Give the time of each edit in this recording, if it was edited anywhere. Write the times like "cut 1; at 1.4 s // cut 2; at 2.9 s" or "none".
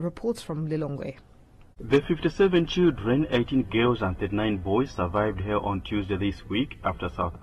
cut 1; at 1.7 s